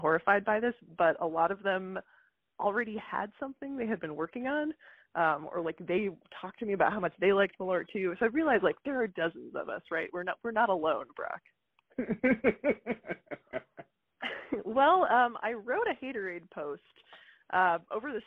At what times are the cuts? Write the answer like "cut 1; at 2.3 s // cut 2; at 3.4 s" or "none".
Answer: cut 1; at 14.1 s